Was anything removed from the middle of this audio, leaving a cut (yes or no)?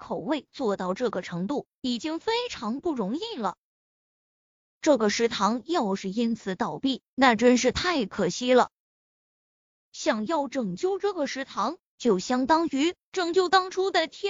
no